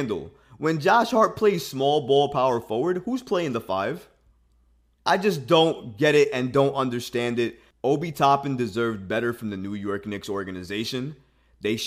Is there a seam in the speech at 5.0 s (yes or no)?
yes